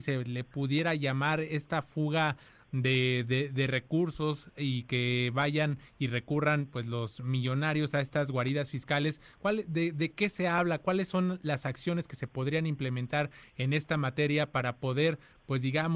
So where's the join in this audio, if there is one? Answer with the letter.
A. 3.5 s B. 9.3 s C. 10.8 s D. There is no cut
D